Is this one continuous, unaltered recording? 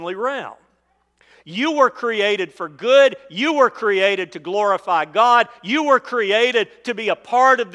yes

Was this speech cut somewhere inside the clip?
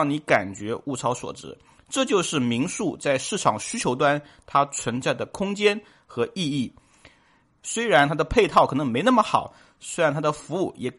yes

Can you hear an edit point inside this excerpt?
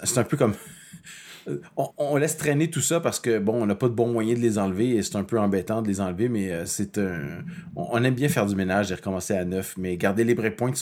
yes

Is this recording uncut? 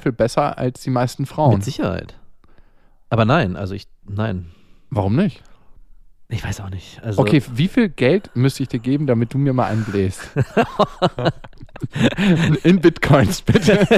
yes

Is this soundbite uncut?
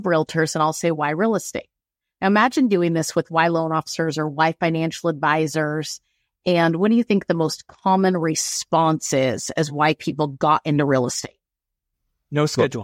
yes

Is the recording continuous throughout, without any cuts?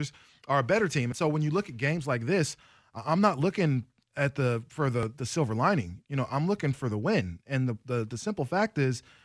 yes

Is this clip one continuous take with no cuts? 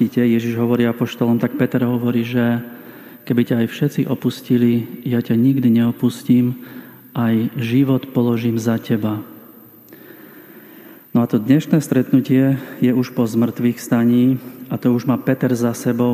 yes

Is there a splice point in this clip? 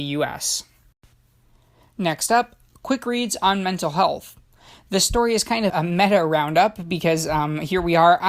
yes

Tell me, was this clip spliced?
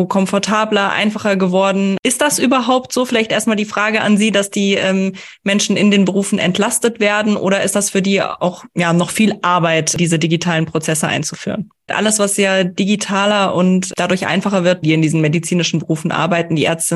yes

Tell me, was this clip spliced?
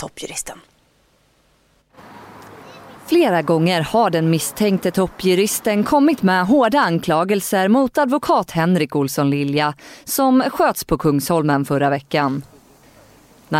no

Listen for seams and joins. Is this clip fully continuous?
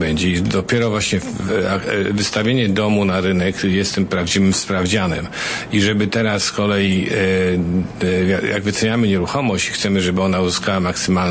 yes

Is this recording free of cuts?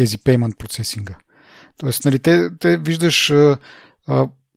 yes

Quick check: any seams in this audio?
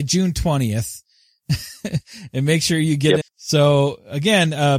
yes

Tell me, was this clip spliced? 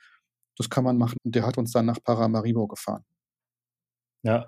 yes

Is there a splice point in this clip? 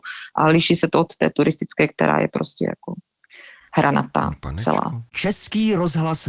no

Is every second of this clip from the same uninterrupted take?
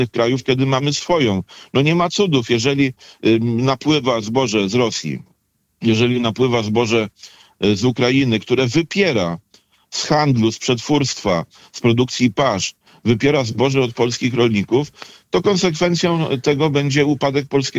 yes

